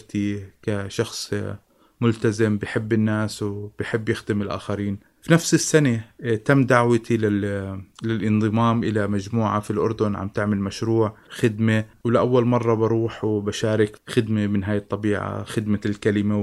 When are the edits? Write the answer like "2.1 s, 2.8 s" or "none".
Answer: 15.4 s